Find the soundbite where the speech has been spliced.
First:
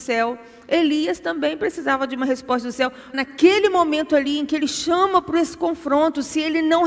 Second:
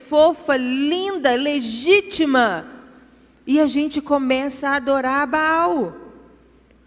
first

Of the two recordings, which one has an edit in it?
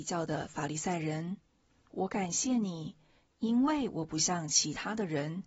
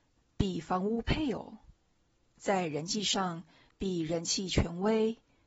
first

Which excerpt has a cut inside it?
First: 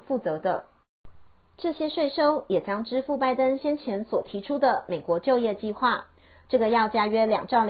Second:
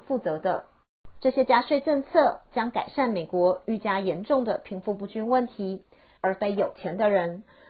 second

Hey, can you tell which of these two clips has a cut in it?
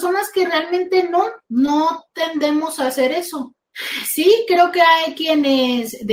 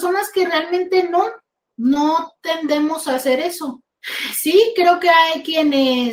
first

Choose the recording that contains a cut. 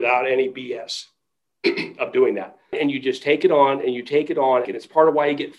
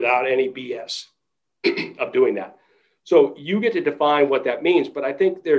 first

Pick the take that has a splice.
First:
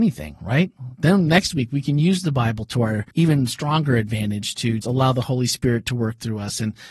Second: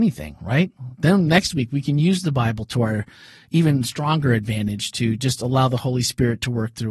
first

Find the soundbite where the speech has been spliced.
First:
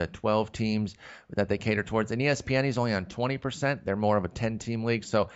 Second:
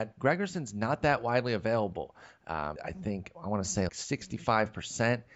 second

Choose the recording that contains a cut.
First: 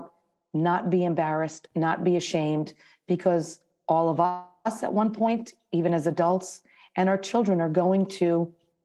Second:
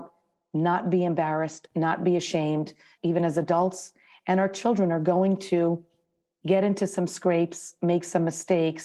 second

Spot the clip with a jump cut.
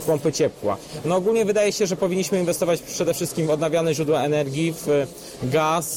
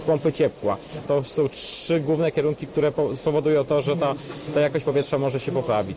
second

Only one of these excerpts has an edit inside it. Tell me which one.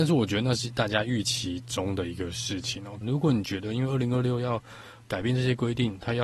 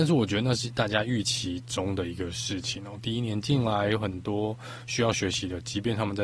first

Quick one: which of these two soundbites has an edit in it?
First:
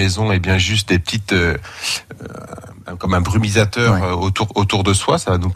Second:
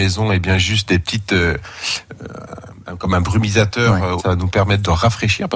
second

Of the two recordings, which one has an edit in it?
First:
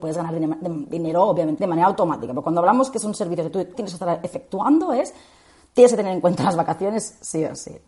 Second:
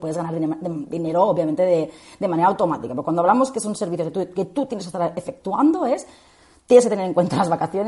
first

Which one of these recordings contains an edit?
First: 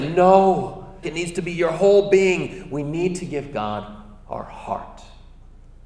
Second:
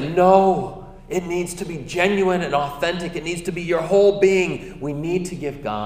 first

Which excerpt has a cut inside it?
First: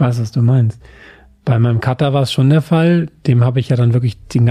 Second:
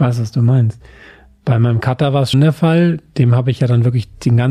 second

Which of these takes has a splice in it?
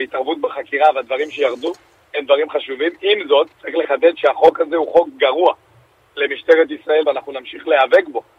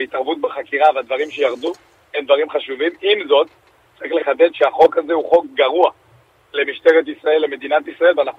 first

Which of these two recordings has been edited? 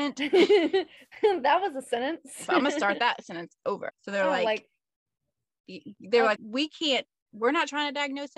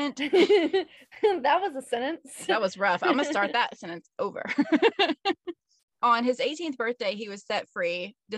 first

